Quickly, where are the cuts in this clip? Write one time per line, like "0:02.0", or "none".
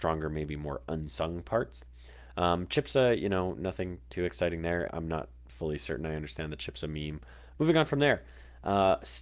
0:04.9
0:07.5